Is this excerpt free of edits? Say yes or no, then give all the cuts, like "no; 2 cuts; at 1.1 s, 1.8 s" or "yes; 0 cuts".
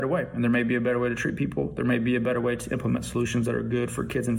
yes; 0 cuts